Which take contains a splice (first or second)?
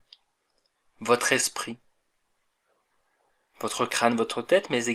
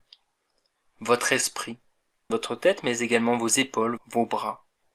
second